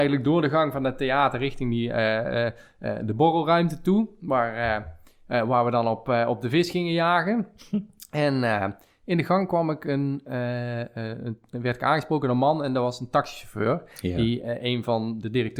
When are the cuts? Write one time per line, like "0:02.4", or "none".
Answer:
none